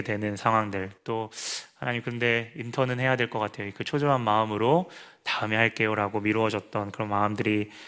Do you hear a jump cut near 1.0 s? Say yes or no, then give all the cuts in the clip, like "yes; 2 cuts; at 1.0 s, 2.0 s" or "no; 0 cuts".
yes; 1 cut; at 1.0 s